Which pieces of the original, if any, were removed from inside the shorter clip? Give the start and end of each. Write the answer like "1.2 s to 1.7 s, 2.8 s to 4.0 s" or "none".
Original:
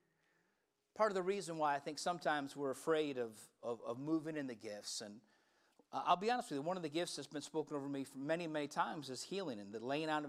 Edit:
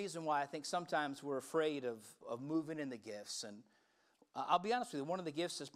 3.5 s to 3.8 s